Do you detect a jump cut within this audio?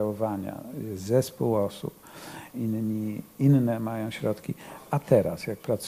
yes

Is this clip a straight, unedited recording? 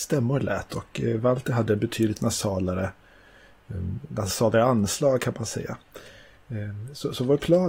yes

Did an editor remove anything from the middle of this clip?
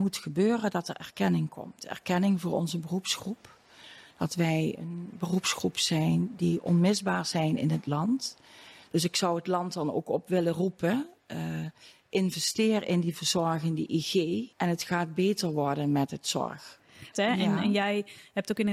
yes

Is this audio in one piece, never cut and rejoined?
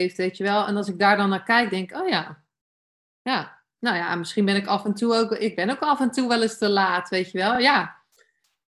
yes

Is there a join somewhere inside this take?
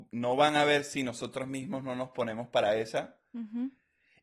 no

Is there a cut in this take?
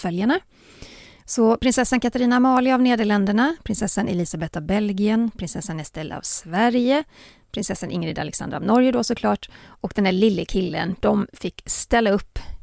yes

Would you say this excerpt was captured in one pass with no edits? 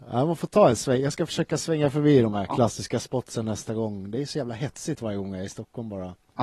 yes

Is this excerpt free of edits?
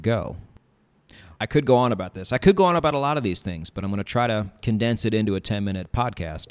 no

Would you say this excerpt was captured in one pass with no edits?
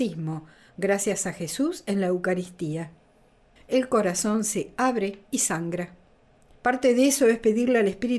no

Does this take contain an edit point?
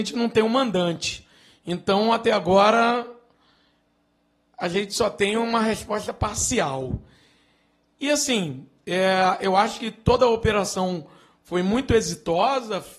no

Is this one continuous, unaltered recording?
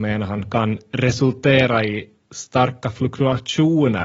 yes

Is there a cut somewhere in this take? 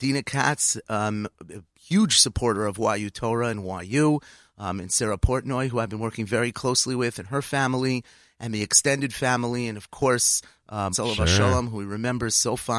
yes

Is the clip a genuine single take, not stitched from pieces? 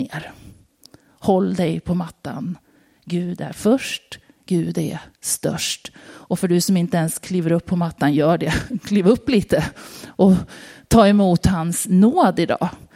yes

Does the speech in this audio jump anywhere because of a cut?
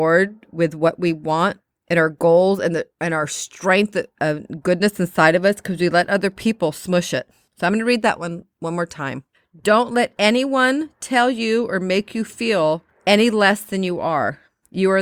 no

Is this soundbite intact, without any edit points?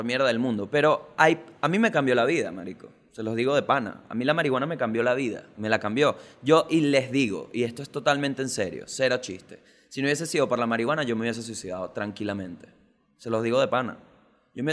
yes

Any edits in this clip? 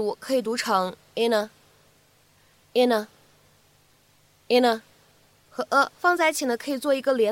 yes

